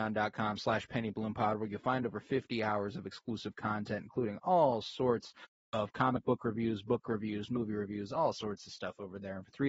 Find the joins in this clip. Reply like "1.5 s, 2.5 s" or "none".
none